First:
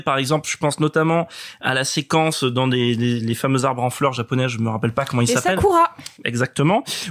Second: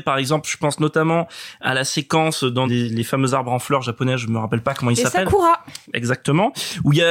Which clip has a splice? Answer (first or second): second